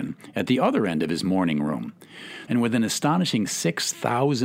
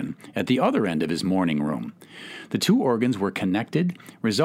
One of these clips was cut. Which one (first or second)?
first